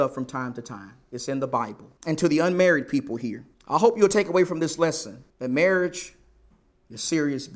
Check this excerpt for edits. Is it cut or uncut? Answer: cut